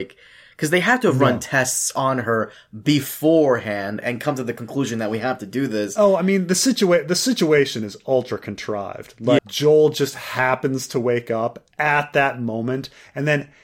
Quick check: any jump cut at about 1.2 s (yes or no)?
no